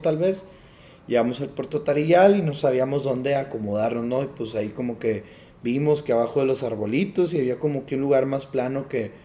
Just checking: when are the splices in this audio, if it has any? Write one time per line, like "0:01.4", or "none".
none

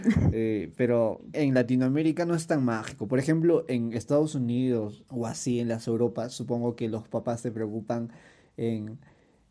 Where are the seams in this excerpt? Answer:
0:01.3
0:05.1

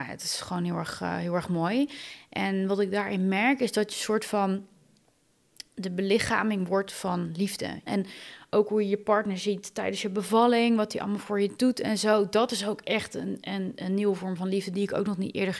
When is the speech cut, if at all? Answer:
0:07.9
0:13.8

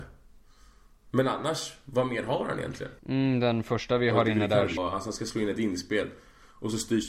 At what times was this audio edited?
0:03.0
0:04.8

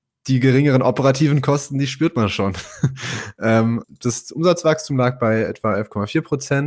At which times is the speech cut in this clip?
0:03.8

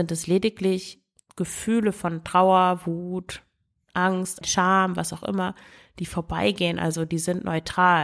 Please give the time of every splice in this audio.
0:04.4

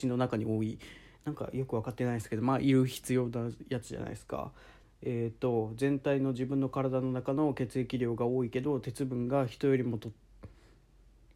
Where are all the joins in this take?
0:04.8

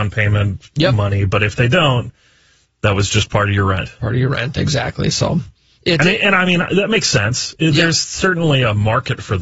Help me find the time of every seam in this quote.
none

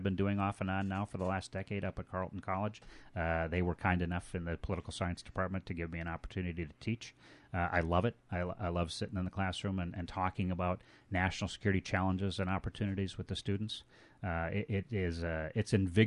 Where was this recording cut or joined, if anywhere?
none

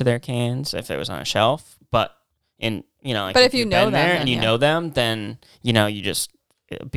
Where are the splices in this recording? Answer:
none

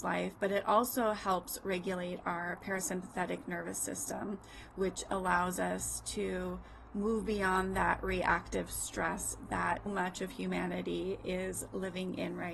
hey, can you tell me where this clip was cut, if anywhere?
0:09.9

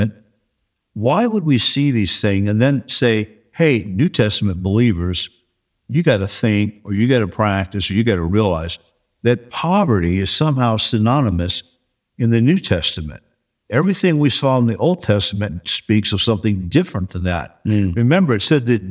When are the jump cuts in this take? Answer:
none

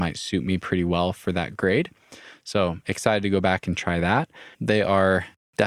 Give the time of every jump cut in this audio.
0:04.5

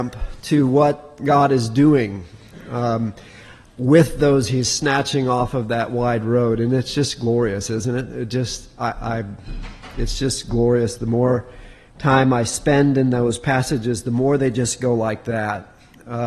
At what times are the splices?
none

